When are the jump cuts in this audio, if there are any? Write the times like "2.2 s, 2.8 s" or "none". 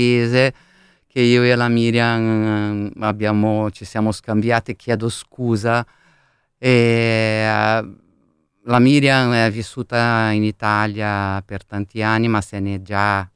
none